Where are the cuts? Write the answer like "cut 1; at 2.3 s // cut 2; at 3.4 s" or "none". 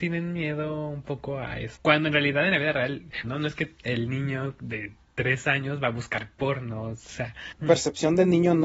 cut 1; at 3.2 s // cut 2; at 7.6 s